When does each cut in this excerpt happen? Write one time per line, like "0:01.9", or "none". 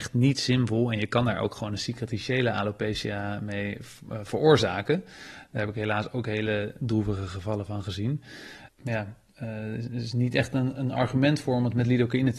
0:08.7

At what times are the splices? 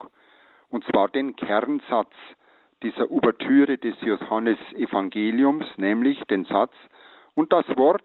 none

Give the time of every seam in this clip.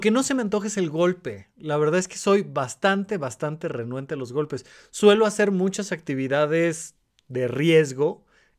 none

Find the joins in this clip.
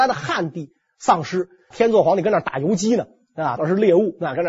0:01.7
0:03.6

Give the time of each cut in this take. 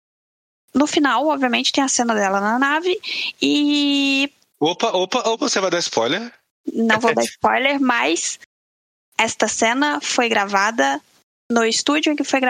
none

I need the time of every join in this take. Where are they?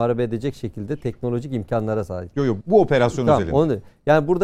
0:02.6

